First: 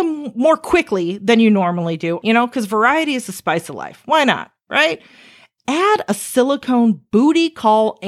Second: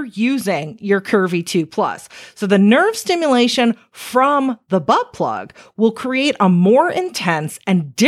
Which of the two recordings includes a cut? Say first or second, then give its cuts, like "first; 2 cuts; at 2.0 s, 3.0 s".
first; 1 cut; at 2.2 s